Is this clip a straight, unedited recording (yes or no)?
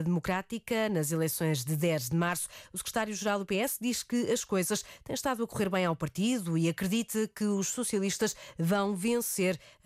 yes